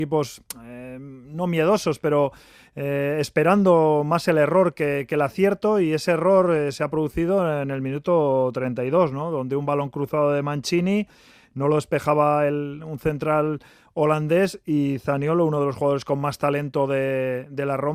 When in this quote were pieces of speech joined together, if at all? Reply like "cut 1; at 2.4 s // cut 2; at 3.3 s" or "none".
none